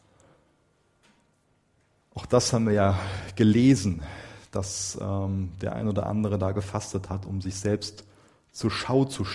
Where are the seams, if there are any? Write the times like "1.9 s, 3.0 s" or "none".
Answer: none